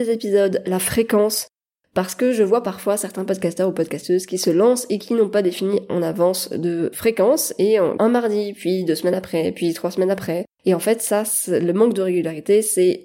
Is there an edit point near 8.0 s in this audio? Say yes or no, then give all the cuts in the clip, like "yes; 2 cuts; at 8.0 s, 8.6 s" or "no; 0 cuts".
yes; 2 cuts; at 6.9 s, 8.0 s